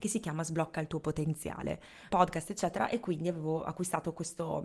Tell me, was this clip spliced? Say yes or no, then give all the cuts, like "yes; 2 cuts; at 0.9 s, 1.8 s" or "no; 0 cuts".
yes; 1 cut; at 2.1 s